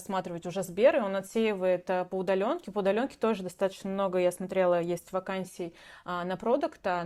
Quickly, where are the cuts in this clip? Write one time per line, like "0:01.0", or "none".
none